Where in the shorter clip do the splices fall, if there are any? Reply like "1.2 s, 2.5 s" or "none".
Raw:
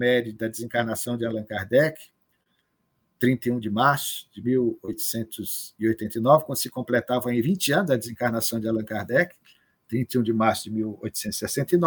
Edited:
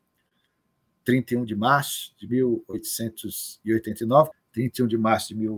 4.3 s